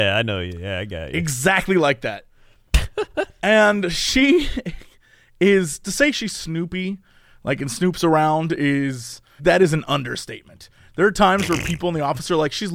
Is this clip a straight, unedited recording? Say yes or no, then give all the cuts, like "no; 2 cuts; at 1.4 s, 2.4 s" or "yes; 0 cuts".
no; 1 cut; at 9.4 s